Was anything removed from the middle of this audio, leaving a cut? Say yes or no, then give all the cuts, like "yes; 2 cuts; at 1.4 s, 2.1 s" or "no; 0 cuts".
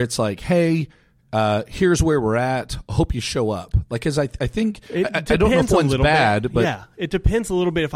no; 0 cuts